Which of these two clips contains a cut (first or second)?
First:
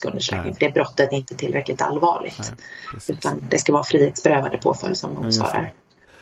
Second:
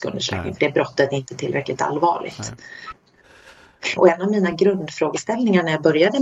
second